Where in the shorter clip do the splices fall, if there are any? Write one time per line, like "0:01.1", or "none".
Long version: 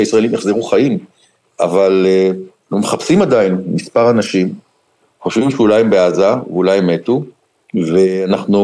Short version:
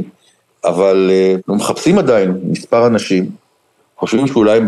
0:01.4

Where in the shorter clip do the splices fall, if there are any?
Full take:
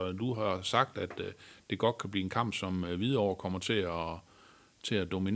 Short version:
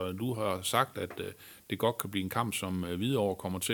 none

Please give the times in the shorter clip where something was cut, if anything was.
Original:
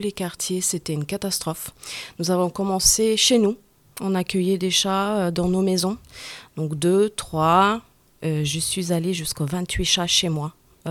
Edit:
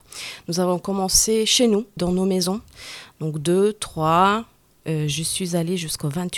0:02.0

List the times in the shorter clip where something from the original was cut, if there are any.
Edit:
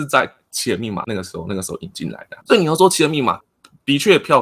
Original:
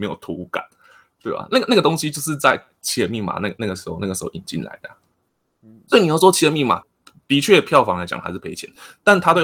0:01.0
0:02.4

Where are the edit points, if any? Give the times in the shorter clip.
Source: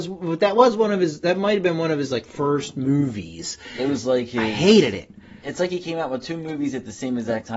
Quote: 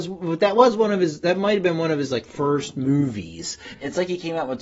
0:03.7

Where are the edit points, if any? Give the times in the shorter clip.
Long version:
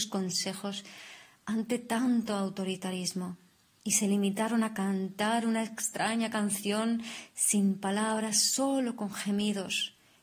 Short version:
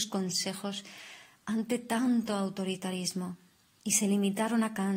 none

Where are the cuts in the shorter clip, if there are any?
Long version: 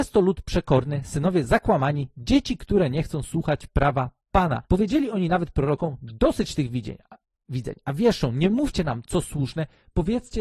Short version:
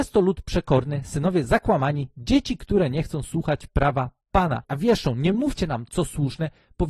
0:04.6

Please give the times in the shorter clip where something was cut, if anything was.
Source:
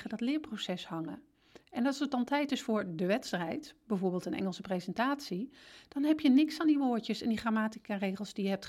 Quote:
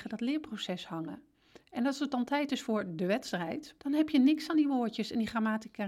0:03.8

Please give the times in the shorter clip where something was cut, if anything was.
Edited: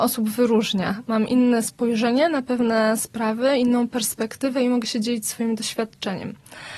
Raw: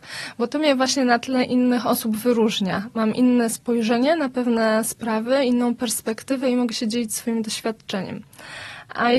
none

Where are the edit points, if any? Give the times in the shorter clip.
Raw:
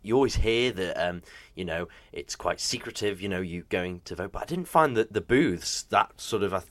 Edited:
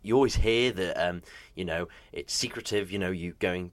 0:02.3

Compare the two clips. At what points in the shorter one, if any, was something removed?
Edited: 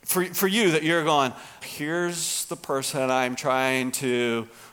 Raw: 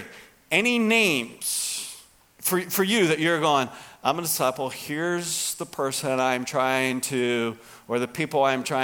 0:01.6

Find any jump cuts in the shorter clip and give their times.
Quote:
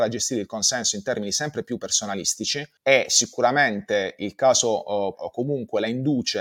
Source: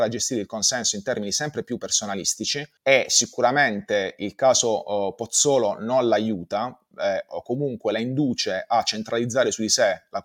0:05.1

